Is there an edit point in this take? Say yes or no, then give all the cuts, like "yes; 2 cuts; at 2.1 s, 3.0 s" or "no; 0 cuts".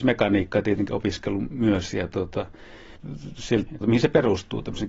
yes; 1 cut; at 3.7 s